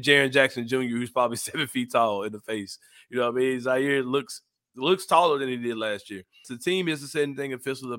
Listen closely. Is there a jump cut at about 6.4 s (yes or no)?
yes